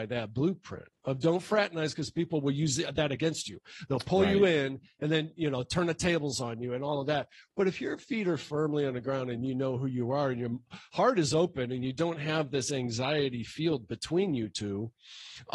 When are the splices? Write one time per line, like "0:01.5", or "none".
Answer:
none